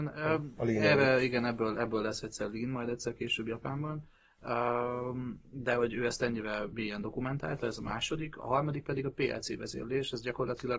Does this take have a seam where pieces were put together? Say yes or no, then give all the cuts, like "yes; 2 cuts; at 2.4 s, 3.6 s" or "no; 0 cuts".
no; 0 cuts